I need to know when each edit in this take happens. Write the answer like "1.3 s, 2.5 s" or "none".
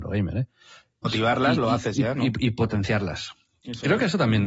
1.0 s